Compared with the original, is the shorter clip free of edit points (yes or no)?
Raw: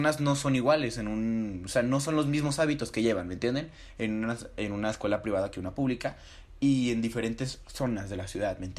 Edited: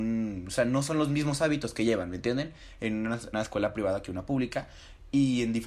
no